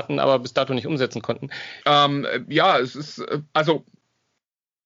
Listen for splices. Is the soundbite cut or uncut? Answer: cut